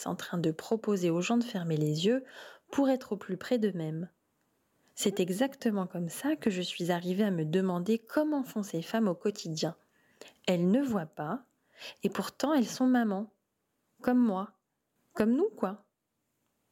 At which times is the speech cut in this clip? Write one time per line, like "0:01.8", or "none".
0:15.0

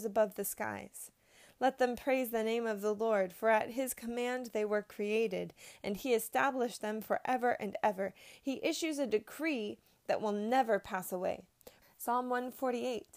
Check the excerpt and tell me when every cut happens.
0:11.8

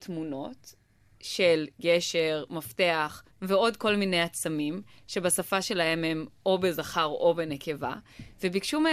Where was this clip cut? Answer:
none

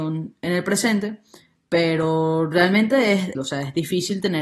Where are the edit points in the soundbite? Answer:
0:03.3

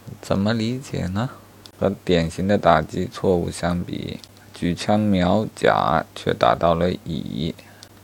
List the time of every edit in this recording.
0:01.8

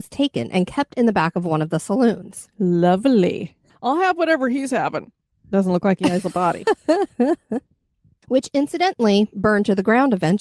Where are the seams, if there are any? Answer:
0:05.3

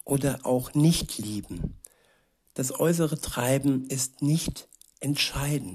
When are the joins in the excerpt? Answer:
none

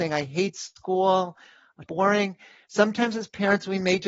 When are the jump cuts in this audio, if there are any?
0:01.9

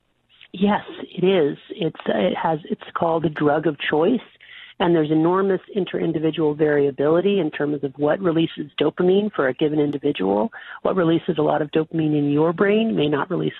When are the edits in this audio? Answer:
none

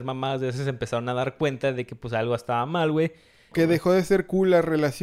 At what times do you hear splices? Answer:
0:03.5

